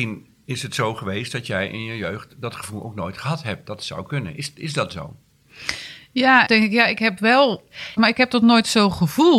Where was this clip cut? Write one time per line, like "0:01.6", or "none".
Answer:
0:06.5
0:08.0